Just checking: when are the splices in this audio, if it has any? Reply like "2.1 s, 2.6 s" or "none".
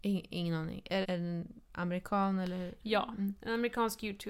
1.0 s